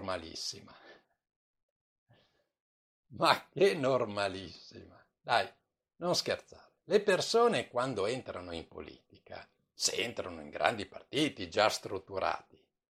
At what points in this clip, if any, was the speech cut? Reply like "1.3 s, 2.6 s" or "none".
none